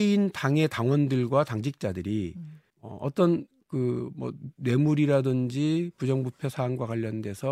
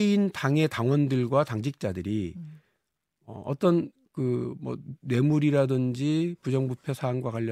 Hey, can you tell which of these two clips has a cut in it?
first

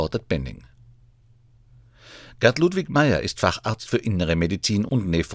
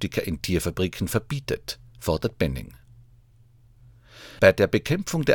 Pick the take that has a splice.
second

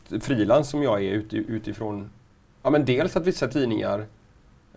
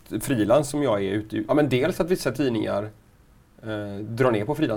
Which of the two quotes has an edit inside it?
second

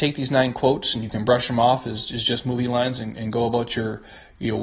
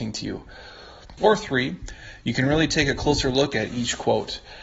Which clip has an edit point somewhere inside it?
second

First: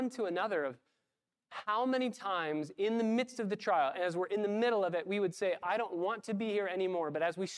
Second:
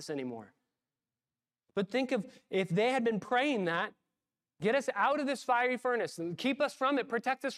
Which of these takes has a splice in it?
first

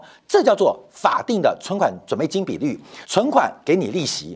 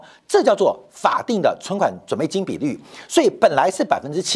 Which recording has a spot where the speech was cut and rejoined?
first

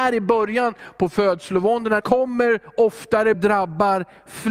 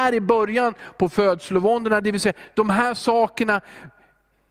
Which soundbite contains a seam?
first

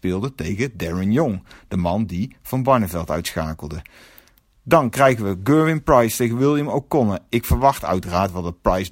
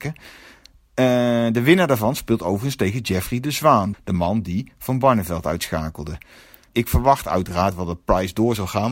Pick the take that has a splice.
second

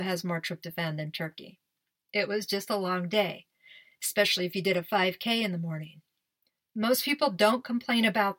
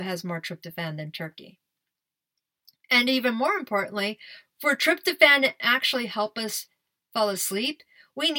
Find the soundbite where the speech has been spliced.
first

